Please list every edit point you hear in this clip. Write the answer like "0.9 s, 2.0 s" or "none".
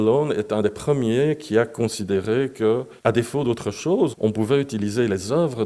3.0 s, 4.1 s